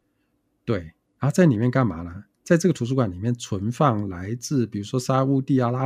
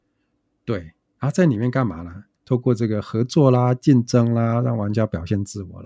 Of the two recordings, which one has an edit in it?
second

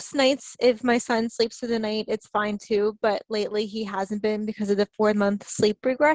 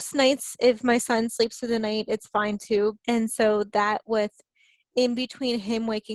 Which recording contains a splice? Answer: second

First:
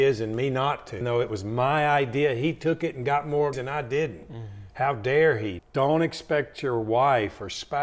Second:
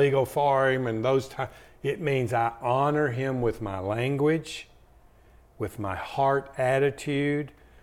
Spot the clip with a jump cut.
first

